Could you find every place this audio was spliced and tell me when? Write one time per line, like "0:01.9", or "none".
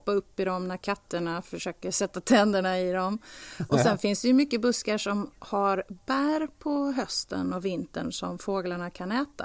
none